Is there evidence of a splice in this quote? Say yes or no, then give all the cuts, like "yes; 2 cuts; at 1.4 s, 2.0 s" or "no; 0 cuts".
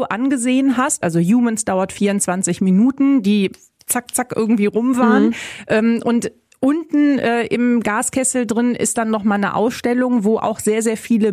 yes; 1 cut; at 1.0 s